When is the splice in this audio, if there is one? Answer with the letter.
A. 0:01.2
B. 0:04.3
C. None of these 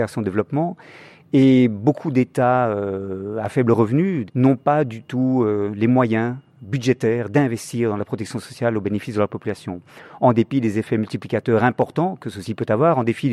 B